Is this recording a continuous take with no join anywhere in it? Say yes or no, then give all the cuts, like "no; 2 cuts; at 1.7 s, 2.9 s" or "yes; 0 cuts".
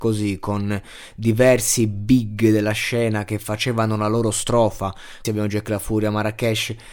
no; 1 cut; at 5.2 s